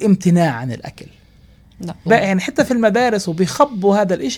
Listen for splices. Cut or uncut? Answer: cut